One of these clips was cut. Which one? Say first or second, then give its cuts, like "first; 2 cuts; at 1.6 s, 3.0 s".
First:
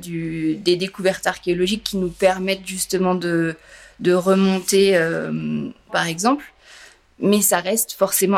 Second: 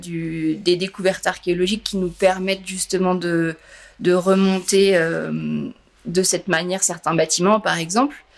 first; 1 cut; at 5.9 s